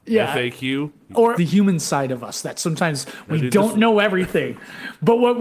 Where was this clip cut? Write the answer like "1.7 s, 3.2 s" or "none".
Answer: 1.3 s